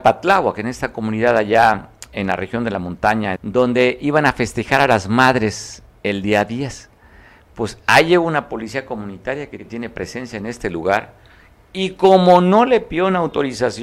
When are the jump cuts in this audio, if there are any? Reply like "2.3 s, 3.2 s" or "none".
3.4 s